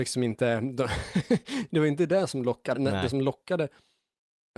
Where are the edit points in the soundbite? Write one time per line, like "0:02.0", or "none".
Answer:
0:02.8